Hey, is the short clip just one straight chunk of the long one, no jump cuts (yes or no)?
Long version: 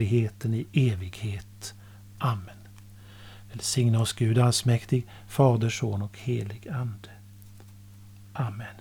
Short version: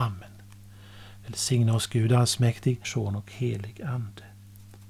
no